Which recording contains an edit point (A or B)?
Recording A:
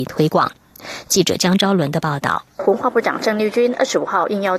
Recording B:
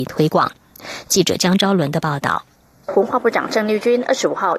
A